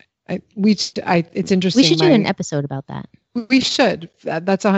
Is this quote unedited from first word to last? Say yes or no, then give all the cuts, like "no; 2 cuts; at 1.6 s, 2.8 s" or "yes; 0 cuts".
yes; 0 cuts